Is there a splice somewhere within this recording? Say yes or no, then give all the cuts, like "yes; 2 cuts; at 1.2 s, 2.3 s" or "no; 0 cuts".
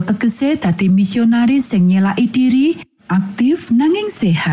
no; 0 cuts